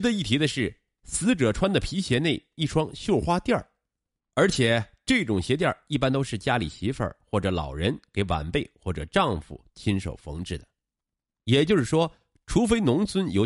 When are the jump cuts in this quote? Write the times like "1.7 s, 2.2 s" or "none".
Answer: 4.2 s